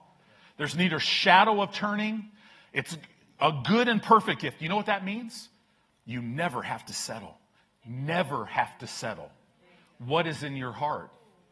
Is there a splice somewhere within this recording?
no; 0 cuts

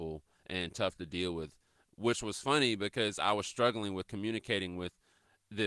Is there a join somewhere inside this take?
no; 0 cuts

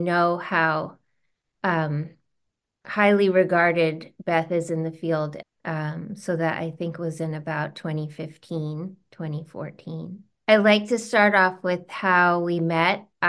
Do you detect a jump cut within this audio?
yes; 2 cuts; at 5.4 s, 10.3 s

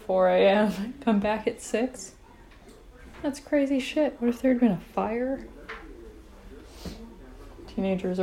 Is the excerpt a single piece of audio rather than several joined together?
yes; 0 cuts

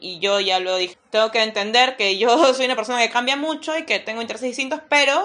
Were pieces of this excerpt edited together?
yes; 1 cut; at 0.9 s

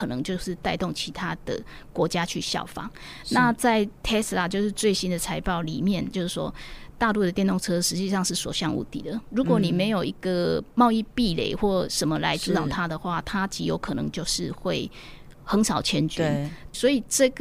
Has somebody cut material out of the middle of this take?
yes; 1 cut; at 6.1 s

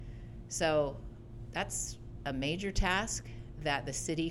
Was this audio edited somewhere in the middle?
no; 0 cuts

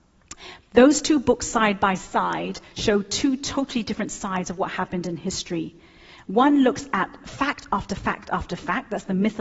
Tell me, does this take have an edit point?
no; 0 cuts

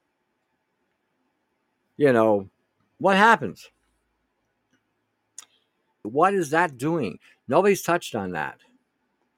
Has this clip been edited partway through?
yes; 1 cut; at 6.0 s

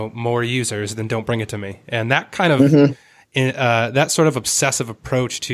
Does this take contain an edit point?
no; 0 cuts

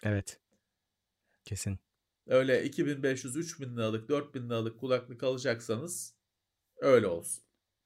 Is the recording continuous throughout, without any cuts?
yes; 0 cuts

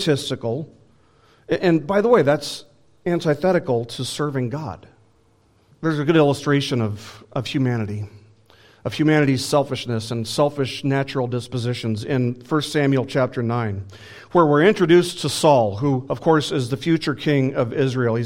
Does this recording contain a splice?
yes; 1 cut; at 5.7 s

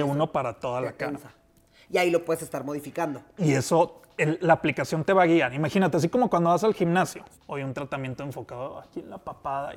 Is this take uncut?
no; 2 cuts; at 4.4 s, 7.3 s

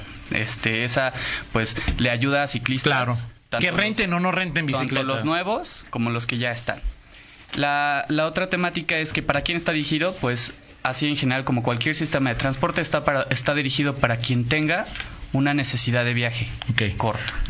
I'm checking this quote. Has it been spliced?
no; 0 cuts

